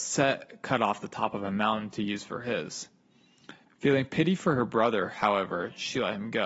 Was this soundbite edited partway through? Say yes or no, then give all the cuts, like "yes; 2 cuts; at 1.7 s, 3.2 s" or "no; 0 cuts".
yes; 1 cut; at 3.7 s